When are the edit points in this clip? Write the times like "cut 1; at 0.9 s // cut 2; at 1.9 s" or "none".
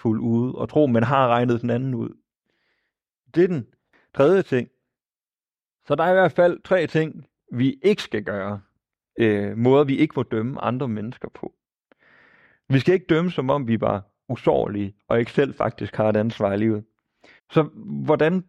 cut 1; at 17.4 s